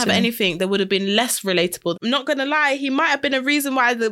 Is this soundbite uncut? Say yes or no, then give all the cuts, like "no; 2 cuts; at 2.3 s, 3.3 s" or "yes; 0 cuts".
no; 1 cut; at 1.9 s